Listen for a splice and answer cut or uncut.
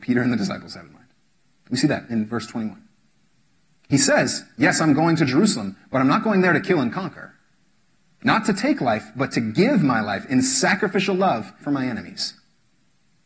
cut